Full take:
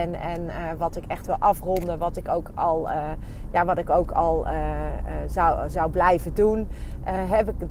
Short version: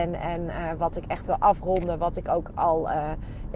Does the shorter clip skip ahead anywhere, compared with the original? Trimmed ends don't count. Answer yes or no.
no